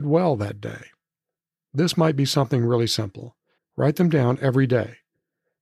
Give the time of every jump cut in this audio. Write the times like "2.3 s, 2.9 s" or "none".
3.6 s